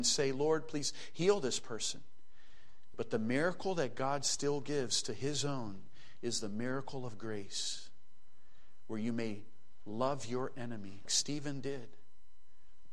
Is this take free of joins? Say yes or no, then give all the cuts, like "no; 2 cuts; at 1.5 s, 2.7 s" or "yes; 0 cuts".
no; 2 cuts; at 2.9 s, 11.1 s